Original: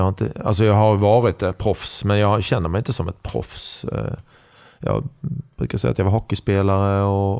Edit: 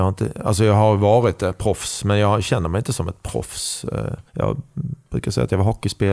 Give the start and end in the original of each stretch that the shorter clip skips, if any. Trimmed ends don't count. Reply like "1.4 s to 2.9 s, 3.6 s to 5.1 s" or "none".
4.3 s to 4.7 s